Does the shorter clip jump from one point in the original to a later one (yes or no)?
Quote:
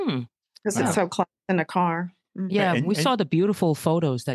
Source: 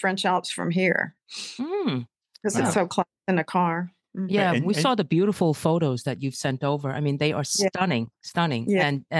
no